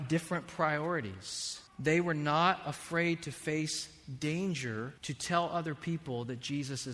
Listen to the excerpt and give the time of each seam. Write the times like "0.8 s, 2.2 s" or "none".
1.7 s, 5.0 s